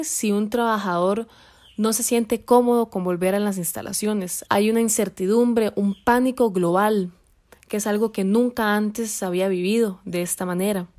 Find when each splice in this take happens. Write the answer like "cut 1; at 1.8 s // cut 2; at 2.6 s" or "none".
cut 1; at 4.5 s